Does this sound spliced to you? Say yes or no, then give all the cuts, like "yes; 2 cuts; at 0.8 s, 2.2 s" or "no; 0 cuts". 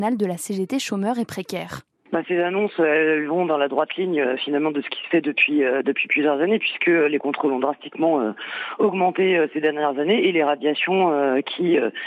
no; 0 cuts